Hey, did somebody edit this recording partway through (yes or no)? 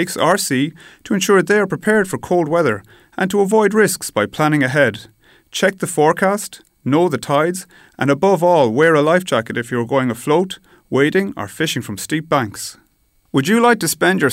no